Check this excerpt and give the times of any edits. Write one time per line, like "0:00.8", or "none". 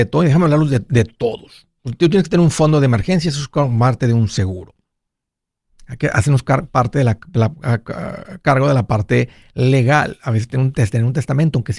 none